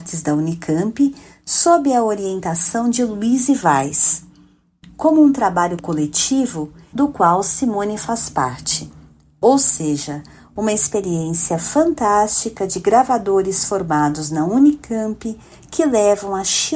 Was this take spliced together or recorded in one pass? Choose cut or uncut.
cut